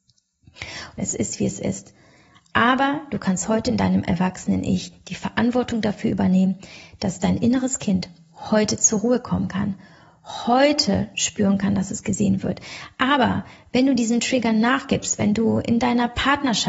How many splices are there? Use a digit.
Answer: 1